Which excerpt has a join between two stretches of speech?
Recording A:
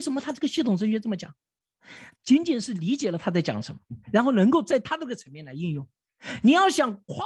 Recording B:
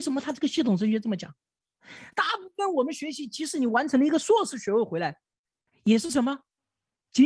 A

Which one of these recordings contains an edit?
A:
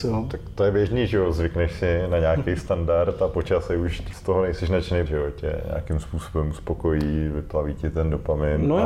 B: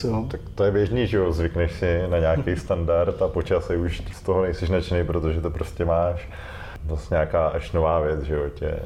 A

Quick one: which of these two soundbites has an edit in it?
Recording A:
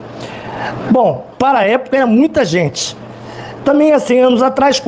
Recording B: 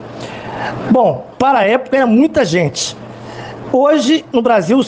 A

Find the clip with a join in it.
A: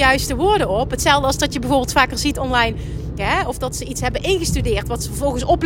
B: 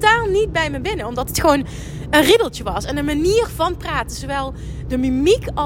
A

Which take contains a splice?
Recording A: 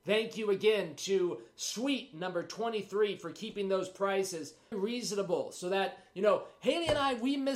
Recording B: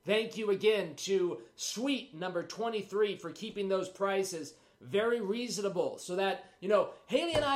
A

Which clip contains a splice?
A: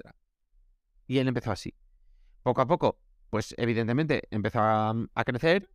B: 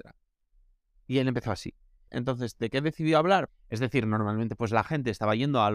B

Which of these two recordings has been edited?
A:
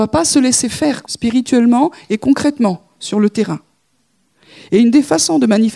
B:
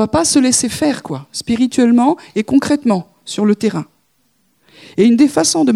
A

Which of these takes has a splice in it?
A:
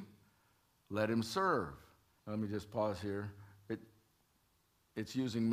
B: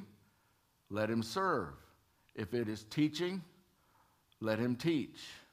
A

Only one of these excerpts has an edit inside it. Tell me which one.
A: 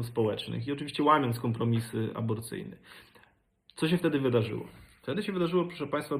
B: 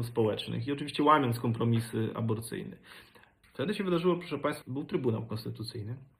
B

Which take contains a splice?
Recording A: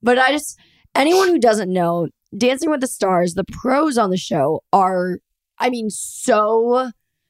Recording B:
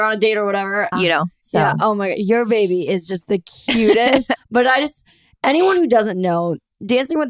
B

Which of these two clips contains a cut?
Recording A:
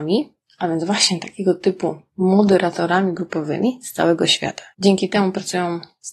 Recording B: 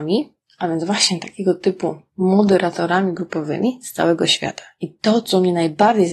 A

